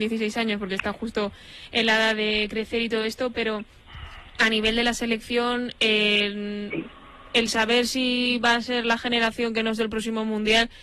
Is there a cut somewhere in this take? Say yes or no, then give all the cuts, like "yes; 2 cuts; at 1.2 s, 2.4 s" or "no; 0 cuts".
no; 0 cuts